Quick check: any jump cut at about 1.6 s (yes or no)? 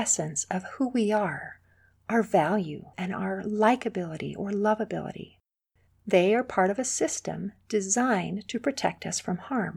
no